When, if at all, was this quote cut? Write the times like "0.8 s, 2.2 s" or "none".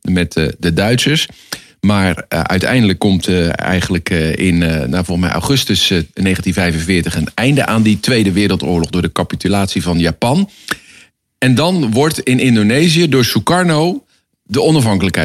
none